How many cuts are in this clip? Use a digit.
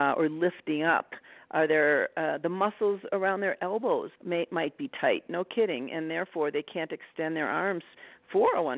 1